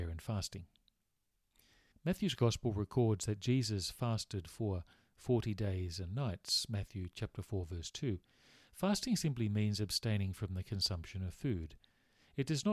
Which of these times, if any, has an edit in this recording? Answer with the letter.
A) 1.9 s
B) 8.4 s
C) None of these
A